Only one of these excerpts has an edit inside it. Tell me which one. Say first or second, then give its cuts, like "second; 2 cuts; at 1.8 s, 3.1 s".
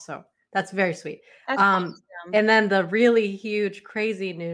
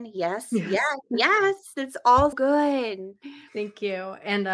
second; 1 cut; at 2.3 s